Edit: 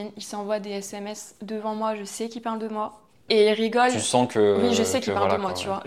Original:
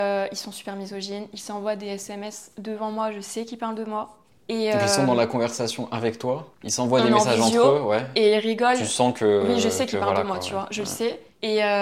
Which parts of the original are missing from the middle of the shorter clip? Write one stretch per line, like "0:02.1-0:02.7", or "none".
0:04.4-0:08.1